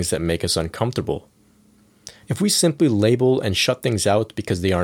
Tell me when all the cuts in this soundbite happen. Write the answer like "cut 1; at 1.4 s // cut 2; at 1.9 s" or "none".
cut 1; at 2.2 s

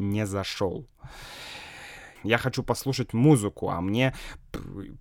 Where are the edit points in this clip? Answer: cut 1; at 2.2 s

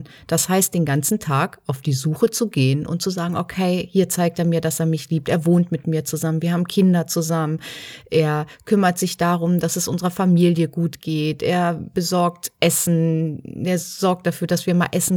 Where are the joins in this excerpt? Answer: none

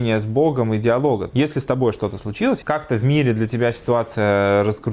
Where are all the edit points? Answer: cut 1; at 1.3 s // cut 2; at 2.6 s

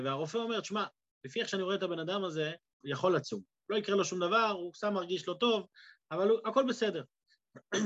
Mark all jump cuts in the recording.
cut 1; at 2.8 s

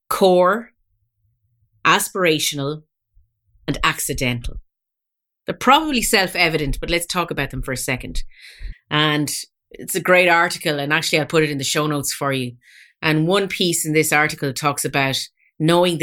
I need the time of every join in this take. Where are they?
cut 1; at 3.7 s // cut 2; at 8.7 s

